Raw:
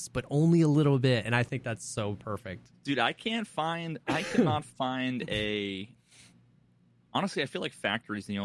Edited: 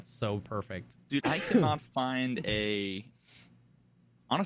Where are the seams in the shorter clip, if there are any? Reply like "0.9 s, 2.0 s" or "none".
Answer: 1.2 s

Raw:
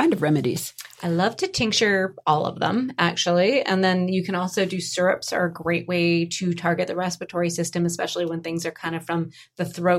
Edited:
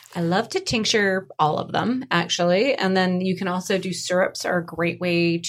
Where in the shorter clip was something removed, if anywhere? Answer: none

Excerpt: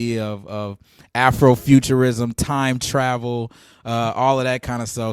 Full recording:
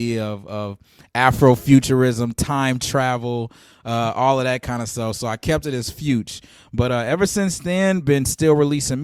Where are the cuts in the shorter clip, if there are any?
none

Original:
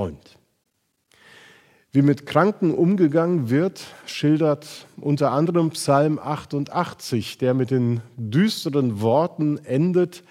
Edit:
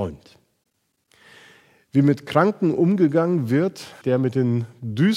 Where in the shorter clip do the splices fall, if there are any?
4.0 s

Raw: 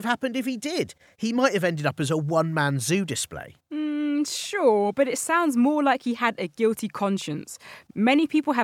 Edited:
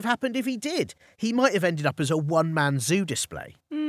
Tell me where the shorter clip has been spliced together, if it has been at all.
none

